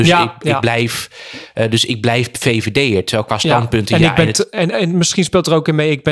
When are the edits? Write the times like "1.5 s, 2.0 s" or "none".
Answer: 4.7 s